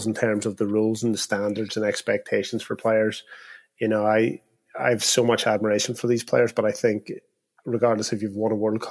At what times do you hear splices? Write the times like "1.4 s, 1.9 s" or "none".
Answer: none